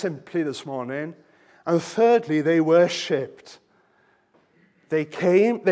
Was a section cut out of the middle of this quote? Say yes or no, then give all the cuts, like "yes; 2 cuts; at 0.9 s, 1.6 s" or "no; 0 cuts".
no; 0 cuts